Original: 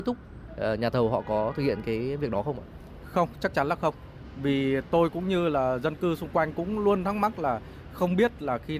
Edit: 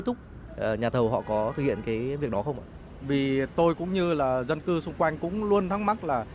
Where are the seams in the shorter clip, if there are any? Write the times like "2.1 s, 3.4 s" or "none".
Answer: 3.0 s